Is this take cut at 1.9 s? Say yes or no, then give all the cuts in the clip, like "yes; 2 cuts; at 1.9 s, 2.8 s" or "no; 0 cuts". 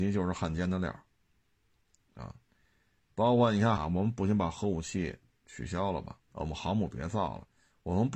no; 2 cuts; at 3.8 s, 6.2 s